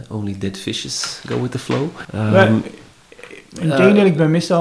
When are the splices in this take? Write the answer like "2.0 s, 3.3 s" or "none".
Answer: 2.0 s